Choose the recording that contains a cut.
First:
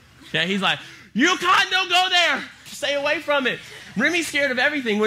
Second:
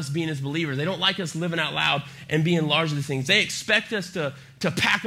first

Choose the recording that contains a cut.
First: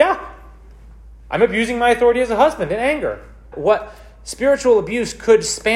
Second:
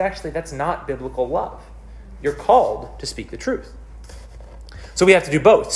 first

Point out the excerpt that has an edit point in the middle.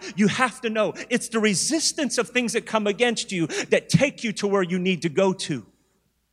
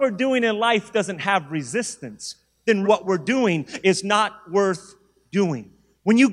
second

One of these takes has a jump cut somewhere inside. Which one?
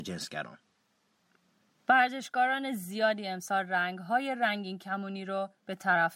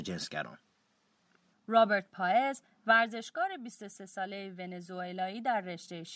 second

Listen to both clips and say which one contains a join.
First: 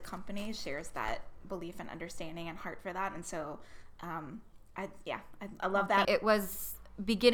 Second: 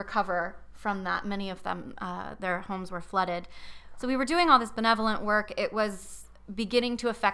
first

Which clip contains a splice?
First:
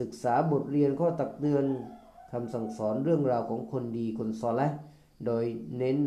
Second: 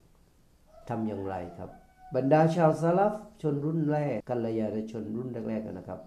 second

